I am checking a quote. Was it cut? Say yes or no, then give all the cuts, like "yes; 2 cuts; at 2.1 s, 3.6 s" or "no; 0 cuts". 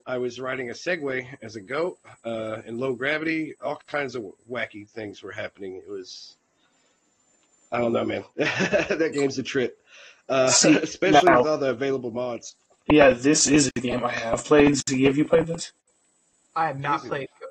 no; 0 cuts